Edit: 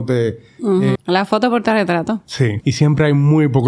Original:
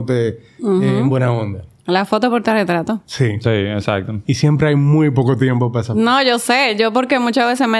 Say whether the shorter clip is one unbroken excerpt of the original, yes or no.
no